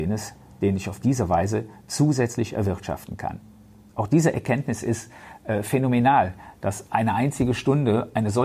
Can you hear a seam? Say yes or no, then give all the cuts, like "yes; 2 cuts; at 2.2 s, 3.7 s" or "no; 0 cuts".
no; 0 cuts